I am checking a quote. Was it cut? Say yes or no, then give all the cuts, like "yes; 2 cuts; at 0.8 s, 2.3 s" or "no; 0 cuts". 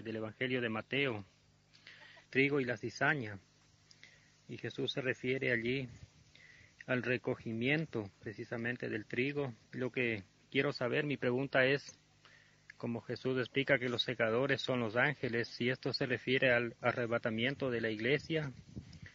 yes; 2 cuts; at 2.3 s, 9.6 s